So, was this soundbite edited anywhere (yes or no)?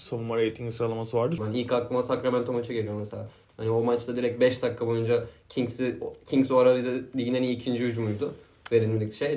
yes